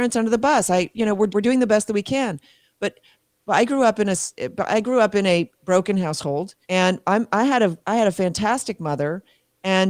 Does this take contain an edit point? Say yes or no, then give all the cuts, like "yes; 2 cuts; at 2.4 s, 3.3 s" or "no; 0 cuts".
yes; 2 cuts; at 1.3 s, 6.6 s